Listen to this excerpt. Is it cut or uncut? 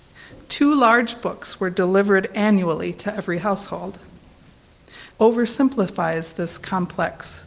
cut